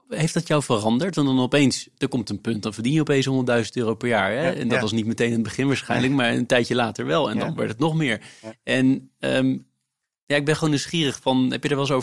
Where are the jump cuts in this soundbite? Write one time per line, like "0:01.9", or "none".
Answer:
none